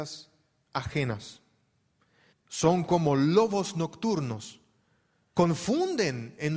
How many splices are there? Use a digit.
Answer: 2